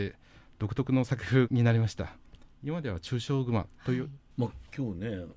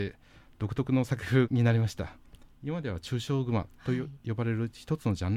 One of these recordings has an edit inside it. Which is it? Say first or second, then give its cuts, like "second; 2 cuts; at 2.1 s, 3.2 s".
first; 1 cut; at 4.2 s